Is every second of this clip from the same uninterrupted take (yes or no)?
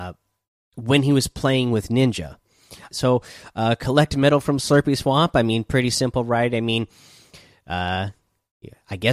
no